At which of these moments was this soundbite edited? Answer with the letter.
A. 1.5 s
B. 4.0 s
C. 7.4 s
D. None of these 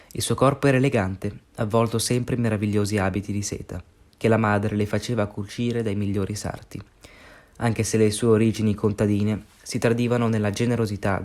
D